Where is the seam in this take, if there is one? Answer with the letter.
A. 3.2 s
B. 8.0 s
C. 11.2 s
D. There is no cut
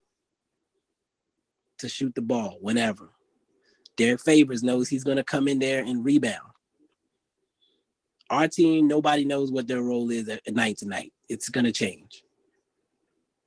D